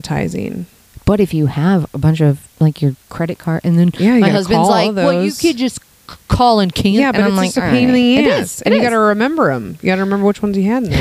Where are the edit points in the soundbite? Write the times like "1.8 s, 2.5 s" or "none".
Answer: none